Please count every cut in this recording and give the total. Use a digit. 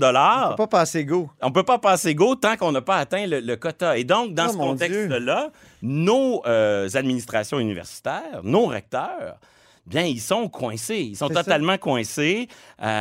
0